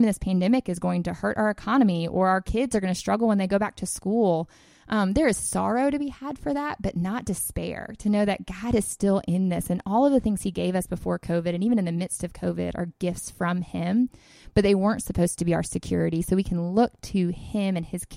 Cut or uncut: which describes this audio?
uncut